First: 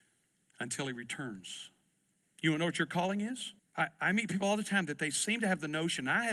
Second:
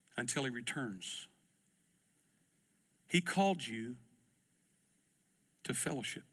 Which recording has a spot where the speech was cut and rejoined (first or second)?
first